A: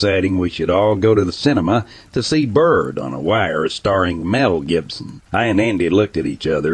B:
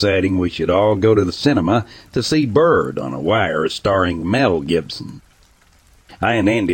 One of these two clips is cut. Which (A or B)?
A